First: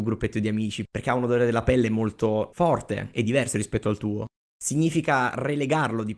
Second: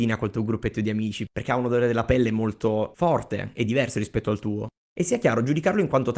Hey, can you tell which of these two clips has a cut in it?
second; 1 cut; at 4.9 s

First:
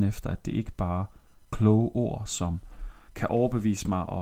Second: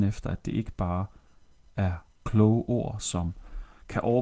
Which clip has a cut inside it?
first; 1 cut; at 1.4 s

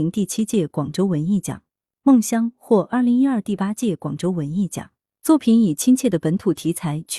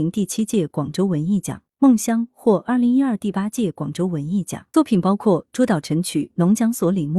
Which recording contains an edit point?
second; 2 cuts; at 1.7 s, 4.7 s

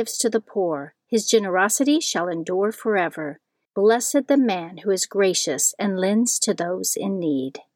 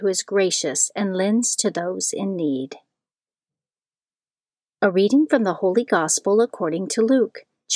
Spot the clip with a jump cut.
first; 1 cut; at 3.6 s

